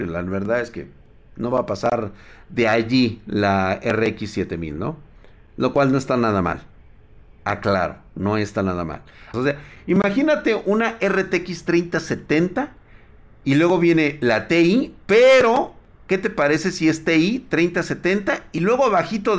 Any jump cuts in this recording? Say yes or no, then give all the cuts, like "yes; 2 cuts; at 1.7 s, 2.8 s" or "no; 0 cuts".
yes; 1 cut; at 9.3 s